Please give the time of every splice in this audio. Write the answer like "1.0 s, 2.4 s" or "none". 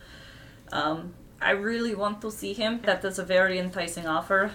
2.8 s

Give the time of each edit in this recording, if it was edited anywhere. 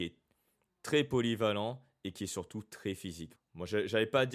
3.4 s

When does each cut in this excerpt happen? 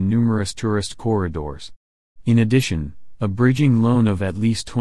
none

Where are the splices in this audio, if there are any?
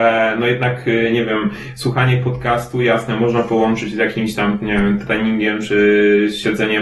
none

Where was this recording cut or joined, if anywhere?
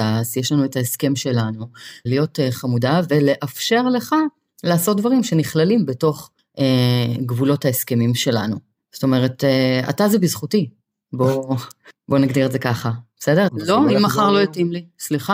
2.1 s, 13.5 s

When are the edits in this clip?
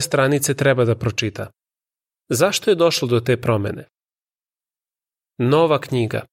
2.1 s

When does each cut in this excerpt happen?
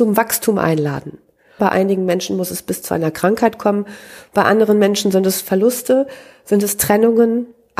1.6 s

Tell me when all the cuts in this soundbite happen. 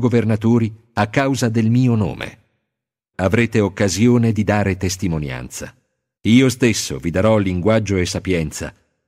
3.1 s, 6.2 s

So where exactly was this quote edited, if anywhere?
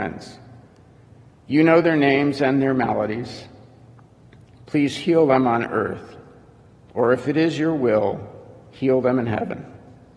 none

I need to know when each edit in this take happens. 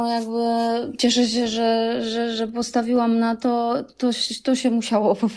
none

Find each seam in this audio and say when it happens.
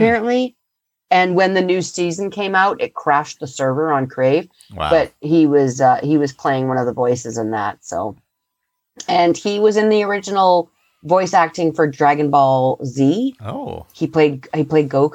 none

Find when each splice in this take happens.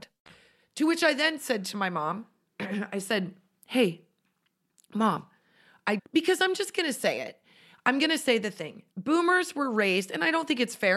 6.0 s, 8.9 s

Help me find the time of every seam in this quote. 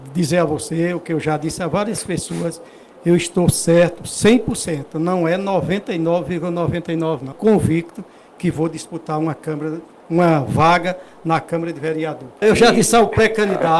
7.3 s, 12.4 s

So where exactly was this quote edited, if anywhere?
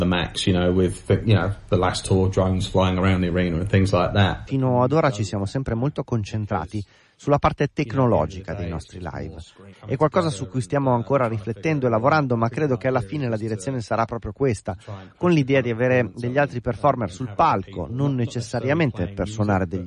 4.5 s, 9.7 s

